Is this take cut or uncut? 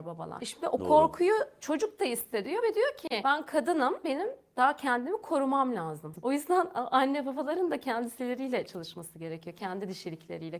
cut